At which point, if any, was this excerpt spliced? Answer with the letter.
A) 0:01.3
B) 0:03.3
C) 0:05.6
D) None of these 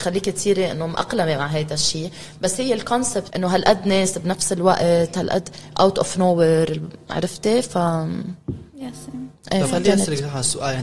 B